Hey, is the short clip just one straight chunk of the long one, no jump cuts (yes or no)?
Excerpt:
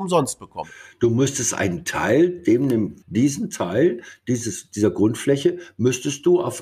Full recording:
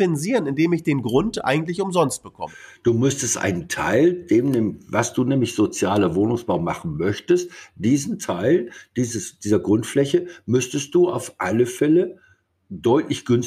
no